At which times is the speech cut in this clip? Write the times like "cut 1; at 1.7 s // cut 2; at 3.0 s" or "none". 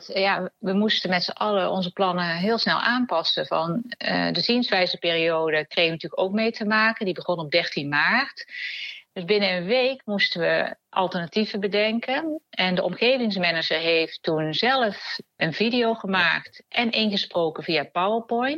cut 1; at 9.1 s // cut 2; at 15.4 s